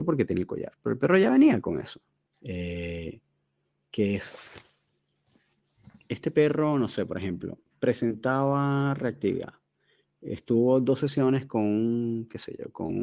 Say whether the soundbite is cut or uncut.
cut